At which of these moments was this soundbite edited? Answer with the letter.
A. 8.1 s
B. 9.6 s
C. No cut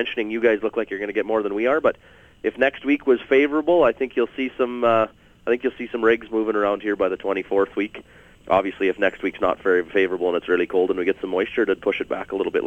C